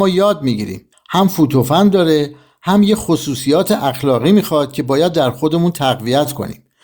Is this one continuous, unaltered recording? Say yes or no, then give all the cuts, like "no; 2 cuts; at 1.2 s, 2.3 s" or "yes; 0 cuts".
no; 1 cut; at 0.9 s